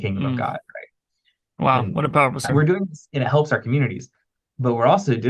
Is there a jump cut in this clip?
yes; 1 cut; at 2.5 s

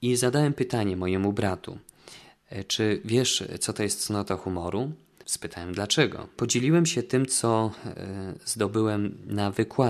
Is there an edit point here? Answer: yes; 2 cuts; at 5.2 s, 6.4 s

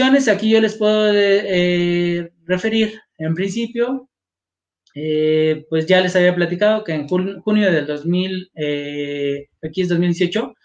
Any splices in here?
no; 0 cuts

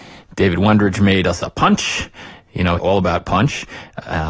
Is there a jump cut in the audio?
yes; 1 cut; at 2.8 s

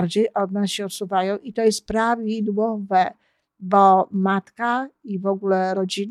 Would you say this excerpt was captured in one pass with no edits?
yes; 0 cuts

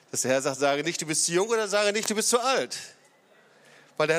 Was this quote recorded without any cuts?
yes; 0 cuts

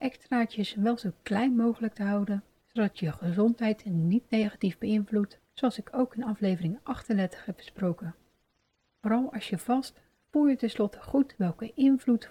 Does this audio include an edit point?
no; 0 cuts

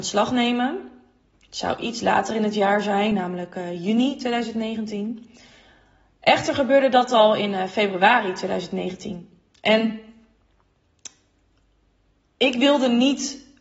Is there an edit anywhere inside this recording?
no; 0 cuts

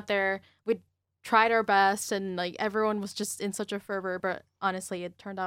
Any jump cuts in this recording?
no; 0 cuts

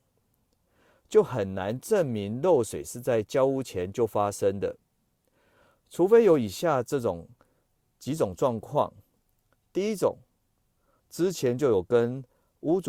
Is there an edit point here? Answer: yes; 1 cut; at 11.0 s

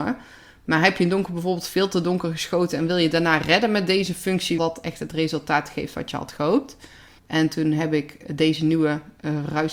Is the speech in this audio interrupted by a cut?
yes; 2 cuts; at 4.6 s, 7.2 s

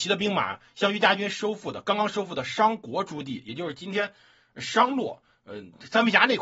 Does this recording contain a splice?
no; 0 cuts

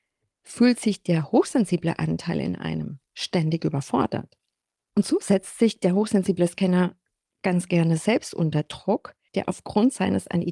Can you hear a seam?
yes; 1 cut; at 9.3 s

